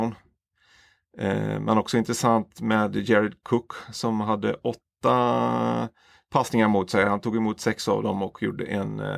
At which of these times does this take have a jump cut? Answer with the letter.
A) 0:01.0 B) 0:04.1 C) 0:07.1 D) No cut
D